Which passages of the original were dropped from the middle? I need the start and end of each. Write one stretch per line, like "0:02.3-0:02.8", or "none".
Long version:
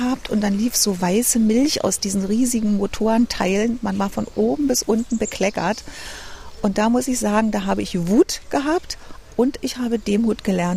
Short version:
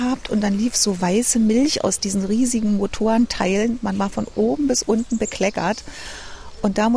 none